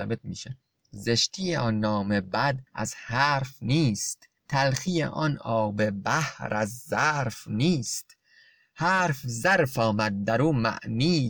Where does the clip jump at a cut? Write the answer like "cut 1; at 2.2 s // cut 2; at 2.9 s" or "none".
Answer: cut 1; at 4.4 s